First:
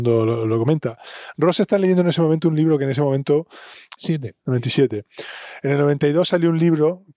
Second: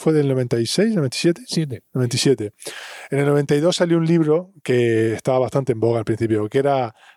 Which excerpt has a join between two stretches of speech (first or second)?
first